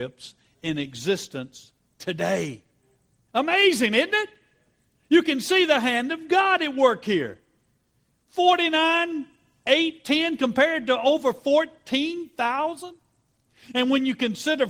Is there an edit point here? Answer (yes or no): no